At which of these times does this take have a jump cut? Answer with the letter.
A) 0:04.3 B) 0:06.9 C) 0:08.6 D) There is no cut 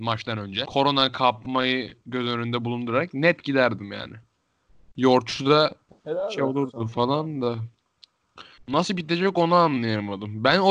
C